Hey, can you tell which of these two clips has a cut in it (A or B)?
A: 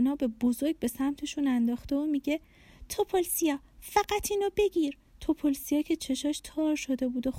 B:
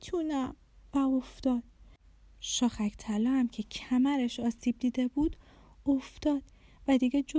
A